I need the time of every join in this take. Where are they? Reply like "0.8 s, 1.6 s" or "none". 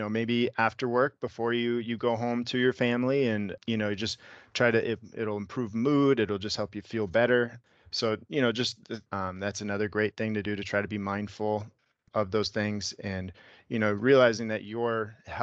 9.1 s